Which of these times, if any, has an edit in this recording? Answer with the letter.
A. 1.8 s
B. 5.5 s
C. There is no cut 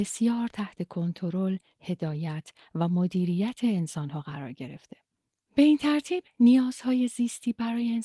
B